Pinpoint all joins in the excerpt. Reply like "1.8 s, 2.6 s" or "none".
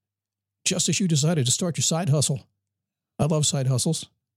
none